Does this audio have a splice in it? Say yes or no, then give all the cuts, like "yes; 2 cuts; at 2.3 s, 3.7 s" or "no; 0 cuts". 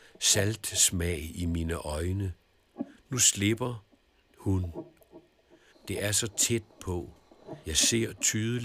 yes; 2 cuts; at 5.7 s, 7.6 s